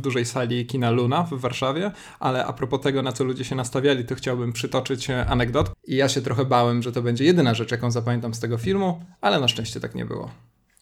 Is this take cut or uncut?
cut